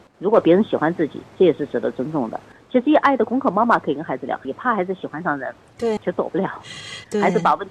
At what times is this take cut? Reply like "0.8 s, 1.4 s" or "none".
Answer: 4.4 s, 6.0 s